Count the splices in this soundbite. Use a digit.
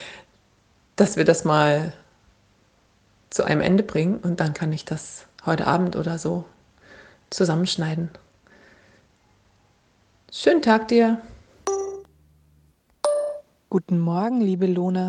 0